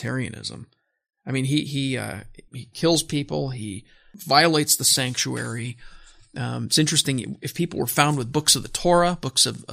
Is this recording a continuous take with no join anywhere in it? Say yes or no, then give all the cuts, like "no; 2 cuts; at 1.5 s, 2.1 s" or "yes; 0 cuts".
no; 1 cut; at 2.5 s